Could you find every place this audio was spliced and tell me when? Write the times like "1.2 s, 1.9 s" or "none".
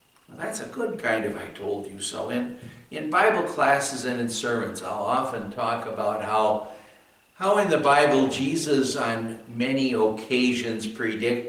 none